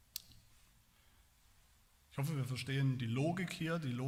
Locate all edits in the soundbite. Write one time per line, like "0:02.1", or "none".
none